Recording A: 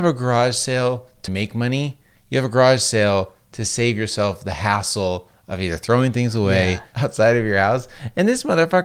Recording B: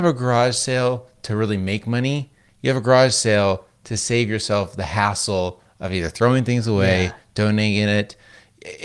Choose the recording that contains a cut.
A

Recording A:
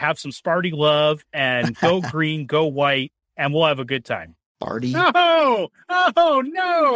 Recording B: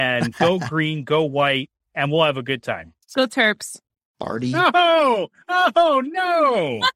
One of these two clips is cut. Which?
A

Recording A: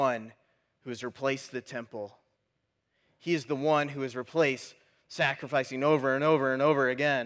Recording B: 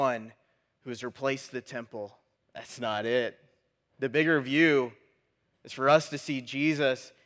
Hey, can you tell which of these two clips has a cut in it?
B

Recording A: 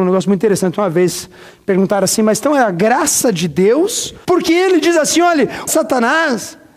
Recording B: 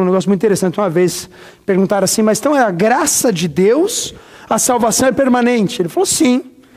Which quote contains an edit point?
A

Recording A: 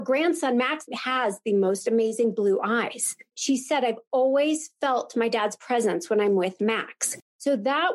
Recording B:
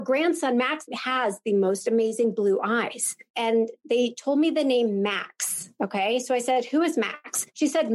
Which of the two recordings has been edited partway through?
B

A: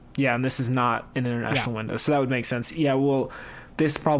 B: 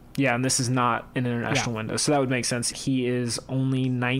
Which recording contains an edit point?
B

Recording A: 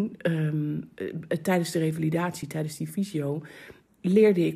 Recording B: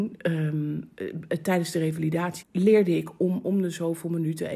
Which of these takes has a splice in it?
B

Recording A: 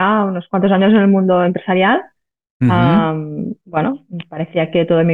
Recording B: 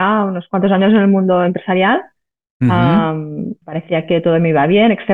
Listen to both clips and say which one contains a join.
B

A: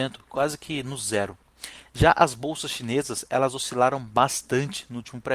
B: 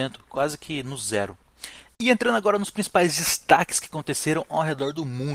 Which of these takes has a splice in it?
B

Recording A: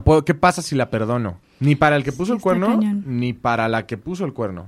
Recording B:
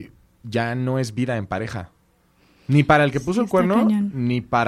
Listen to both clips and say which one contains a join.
A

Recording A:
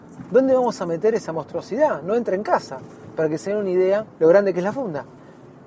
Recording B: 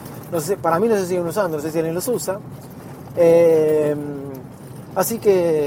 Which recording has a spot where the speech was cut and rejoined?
A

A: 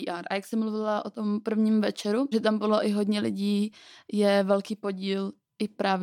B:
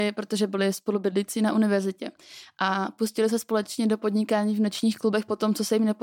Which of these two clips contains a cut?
A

